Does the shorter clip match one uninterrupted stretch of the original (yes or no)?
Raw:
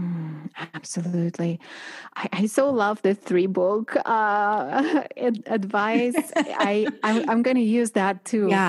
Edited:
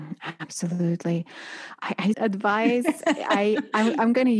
no